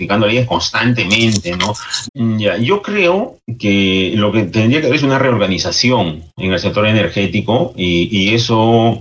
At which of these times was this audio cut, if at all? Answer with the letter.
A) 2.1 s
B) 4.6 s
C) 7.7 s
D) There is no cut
A